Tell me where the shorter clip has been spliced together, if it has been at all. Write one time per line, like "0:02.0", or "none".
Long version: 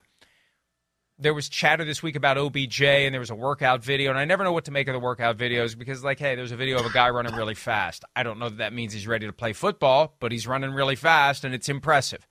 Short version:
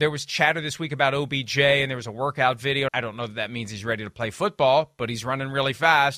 0:02.9

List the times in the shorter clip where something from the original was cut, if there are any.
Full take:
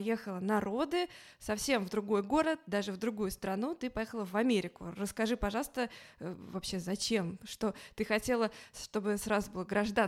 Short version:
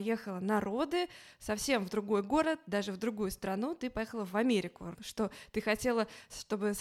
0:04.9

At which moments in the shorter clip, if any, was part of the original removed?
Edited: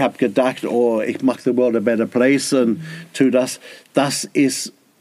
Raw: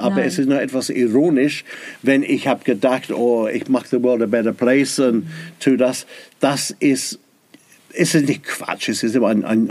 none

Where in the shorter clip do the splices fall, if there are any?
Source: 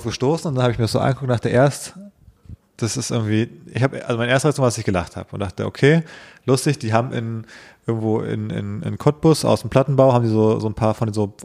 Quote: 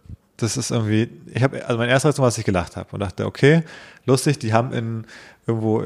none

